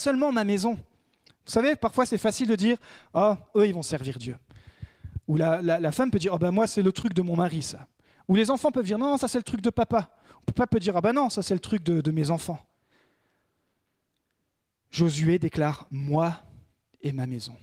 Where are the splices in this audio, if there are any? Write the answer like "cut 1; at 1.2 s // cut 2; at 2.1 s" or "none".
cut 1; at 3.5 s